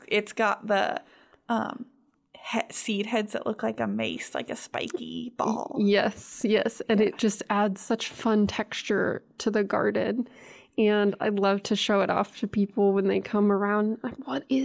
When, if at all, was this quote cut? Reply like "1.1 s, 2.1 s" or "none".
none

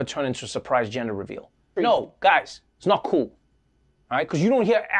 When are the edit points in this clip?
1.8 s

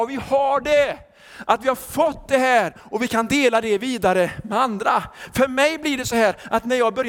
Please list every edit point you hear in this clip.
none

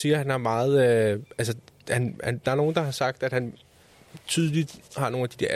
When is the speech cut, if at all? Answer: none

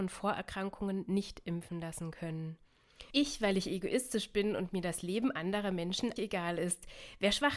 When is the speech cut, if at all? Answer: 3.1 s, 6.2 s

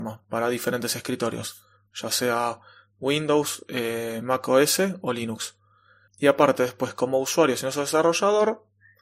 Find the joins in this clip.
6.1 s

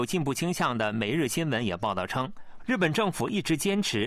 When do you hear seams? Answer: 2.6 s

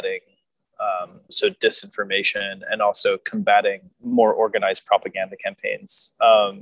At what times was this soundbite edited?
1.3 s, 3.9 s

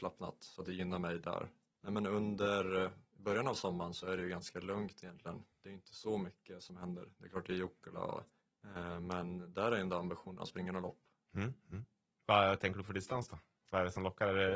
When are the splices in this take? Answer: none

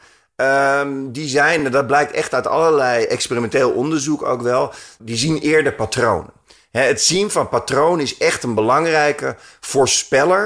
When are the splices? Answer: none

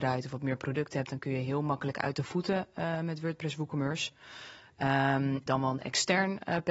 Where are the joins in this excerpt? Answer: 5.5 s

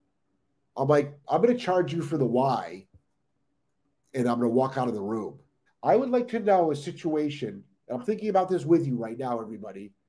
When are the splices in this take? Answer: 1.2 s, 5.7 s

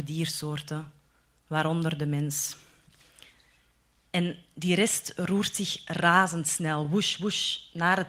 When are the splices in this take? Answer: none

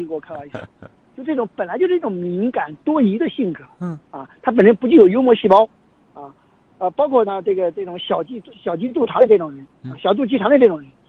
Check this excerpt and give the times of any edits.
8.5 s

